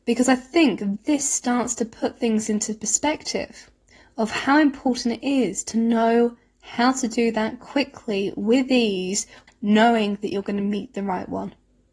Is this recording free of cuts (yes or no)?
no